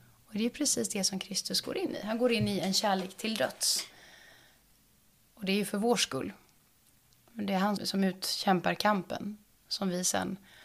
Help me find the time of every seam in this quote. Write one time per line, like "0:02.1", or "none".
0:07.8